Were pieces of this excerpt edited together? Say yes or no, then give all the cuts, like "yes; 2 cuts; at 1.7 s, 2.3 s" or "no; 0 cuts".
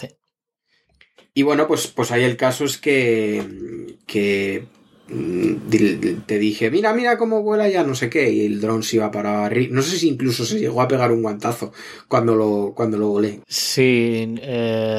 yes; 1 cut; at 13.4 s